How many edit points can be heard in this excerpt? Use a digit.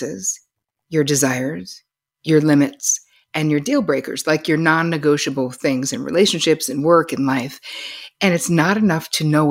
0